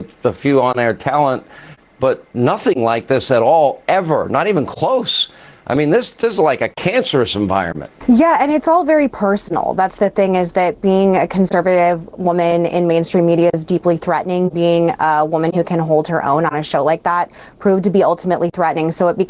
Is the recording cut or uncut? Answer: uncut